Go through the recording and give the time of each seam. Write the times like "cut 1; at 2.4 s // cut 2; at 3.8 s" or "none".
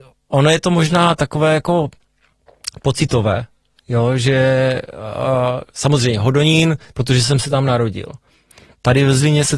cut 1; at 6.9 s